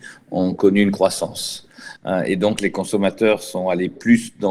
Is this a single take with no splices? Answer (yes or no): no